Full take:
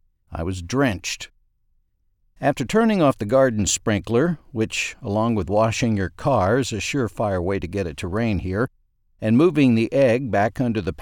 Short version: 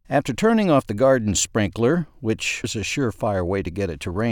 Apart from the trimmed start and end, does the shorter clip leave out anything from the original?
yes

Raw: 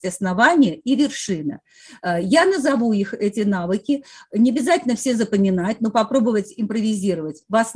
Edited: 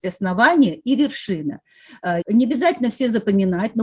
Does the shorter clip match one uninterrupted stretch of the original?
no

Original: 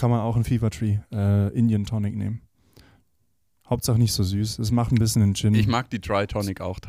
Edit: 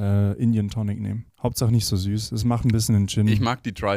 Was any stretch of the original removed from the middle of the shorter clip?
yes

